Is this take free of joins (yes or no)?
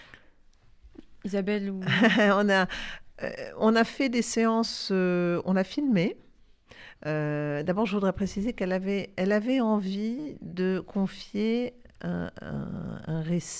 no